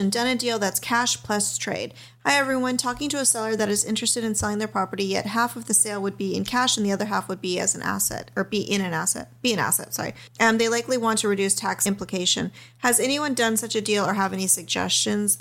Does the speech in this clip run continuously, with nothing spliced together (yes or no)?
yes